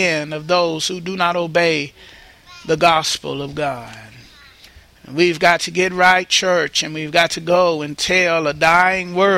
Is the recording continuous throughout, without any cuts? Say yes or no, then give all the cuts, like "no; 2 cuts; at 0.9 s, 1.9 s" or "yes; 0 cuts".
yes; 0 cuts